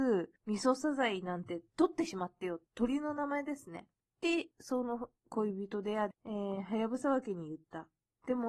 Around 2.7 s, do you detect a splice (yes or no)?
no